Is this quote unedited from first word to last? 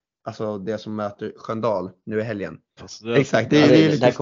no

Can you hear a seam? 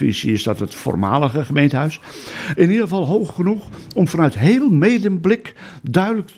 yes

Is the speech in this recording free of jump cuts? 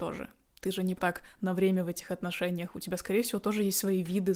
no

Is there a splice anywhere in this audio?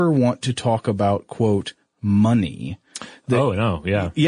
no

